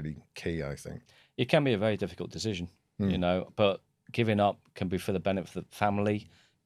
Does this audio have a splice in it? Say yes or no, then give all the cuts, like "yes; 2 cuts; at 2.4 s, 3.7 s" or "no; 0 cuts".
no; 0 cuts